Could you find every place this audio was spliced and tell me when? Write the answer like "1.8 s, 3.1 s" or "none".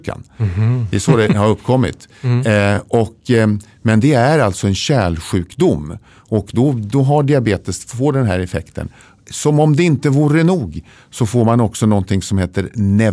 none